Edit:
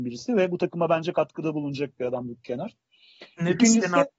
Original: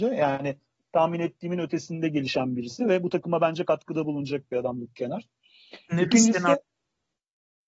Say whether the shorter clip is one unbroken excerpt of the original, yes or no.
yes